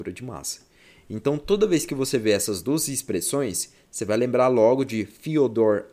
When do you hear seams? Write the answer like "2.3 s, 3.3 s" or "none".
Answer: none